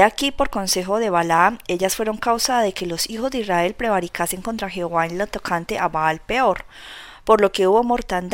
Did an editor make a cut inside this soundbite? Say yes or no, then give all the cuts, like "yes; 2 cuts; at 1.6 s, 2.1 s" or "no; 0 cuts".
no; 0 cuts